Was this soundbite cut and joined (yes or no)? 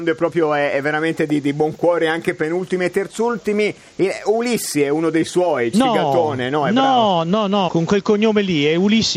yes